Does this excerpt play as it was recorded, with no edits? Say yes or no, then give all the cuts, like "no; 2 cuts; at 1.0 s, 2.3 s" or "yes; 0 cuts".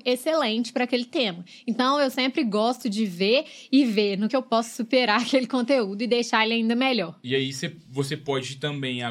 no; 1 cut; at 4.3 s